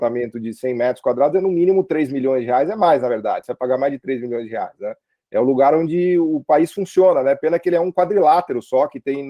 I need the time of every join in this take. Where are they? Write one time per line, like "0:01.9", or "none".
none